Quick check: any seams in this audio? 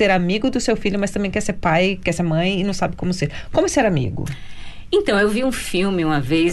no; 0 cuts

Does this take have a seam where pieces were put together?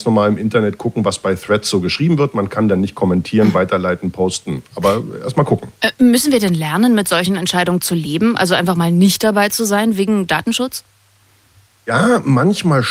no; 0 cuts

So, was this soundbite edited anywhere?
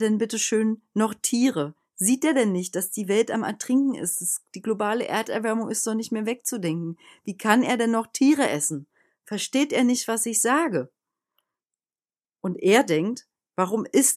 no; 0 cuts

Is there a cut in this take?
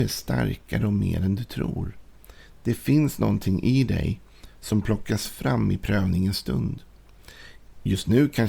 no; 0 cuts

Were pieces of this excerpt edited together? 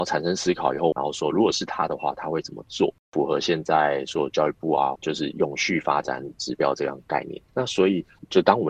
yes; 3 cuts; at 0.9 s, 5.0 s, 7.5 s

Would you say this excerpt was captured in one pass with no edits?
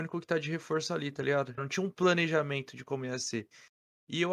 no; 1 cut; at 1.6 s

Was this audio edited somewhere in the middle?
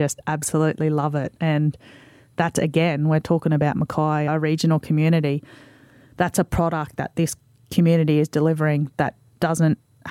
no; 0 cuts

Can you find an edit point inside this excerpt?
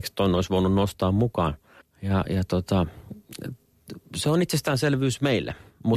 yes; 1 cut; at 1.8 s

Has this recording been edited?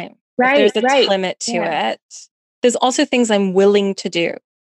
yes; 2 cuts; at 1.1 s, 2.5 s

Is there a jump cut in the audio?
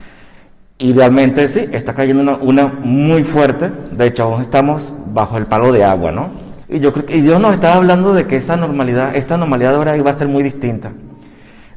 yes; 1 cut; at 6.6 s

